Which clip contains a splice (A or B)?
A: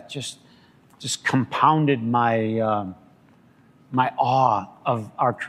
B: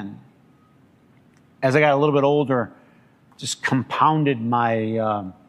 B